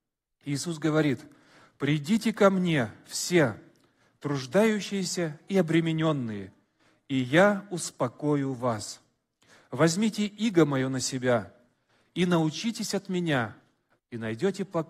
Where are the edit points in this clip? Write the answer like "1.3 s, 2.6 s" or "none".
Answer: 14.0 s